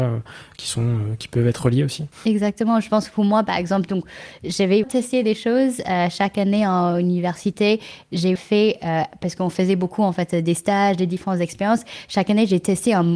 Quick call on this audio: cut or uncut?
cut